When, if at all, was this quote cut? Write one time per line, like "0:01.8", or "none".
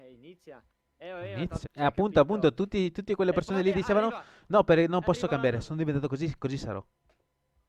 0:01.6